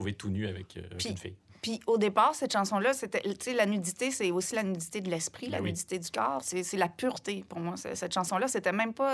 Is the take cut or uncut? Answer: uncut